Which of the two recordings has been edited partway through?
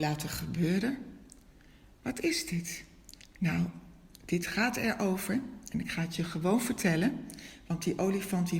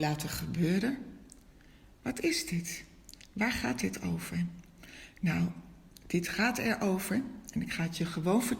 first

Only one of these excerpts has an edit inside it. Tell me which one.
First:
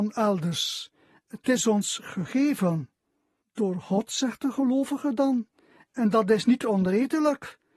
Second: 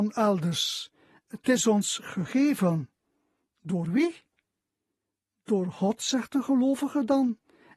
first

